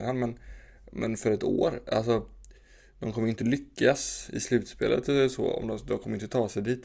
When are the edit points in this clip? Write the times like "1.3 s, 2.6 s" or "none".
none